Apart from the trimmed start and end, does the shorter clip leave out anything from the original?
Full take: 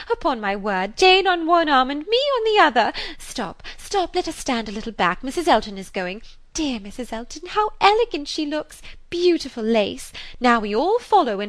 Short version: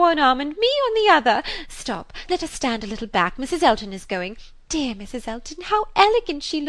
yes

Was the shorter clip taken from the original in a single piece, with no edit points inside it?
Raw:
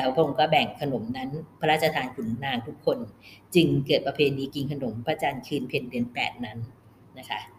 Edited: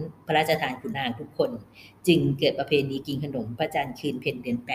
no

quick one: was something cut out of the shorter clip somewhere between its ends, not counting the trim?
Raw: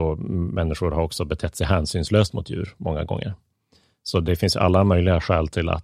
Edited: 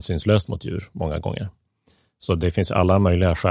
no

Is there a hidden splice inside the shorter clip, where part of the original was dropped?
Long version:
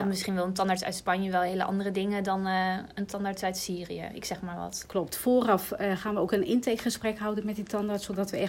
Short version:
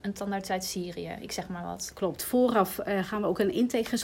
no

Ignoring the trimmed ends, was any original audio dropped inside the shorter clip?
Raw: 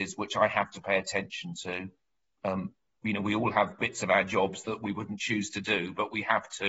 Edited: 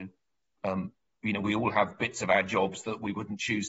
no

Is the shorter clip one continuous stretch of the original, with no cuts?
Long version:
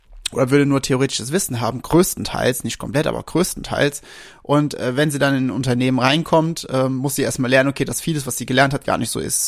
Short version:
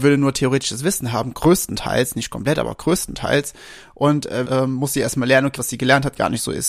no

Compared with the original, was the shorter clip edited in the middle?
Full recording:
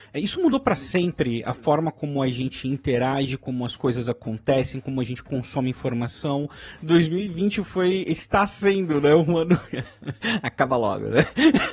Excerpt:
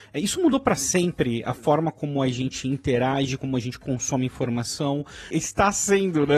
yes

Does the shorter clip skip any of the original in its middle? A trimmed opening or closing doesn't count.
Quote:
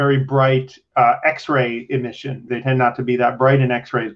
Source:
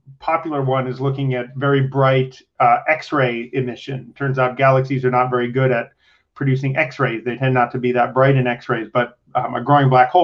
yes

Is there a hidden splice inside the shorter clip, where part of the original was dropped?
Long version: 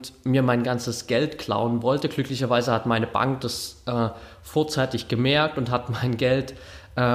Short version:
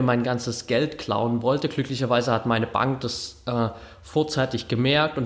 no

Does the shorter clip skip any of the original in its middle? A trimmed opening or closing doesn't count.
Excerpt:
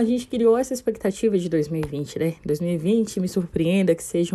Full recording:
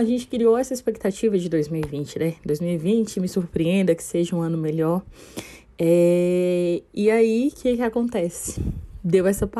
no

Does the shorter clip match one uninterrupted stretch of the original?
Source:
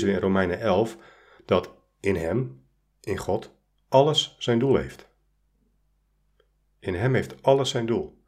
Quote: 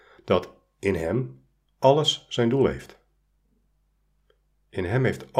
no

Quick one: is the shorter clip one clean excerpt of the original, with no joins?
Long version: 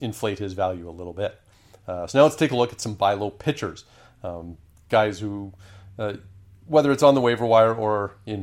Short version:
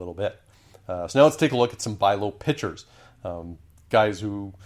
yes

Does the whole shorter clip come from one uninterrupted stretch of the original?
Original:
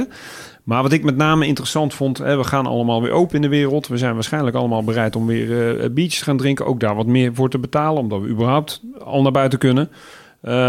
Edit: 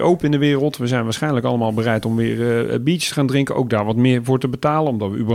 yes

